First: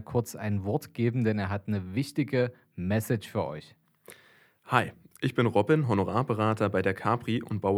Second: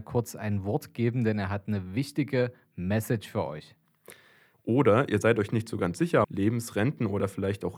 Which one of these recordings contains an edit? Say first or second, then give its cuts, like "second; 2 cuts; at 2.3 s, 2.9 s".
second; 2 cuts; at 4.5 s, 6.2 s